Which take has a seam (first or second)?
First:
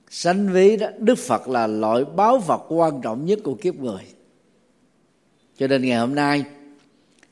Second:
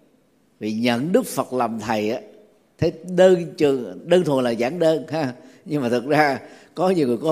second